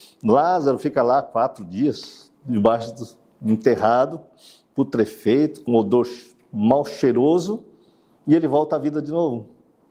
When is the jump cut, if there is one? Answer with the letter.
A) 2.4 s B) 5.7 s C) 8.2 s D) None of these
B